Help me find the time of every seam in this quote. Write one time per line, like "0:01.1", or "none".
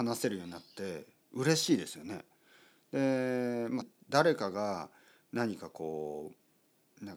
0:03.8